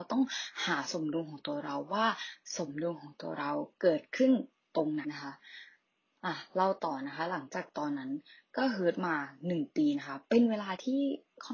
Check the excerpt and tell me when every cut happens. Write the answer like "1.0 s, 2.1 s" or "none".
5.0 s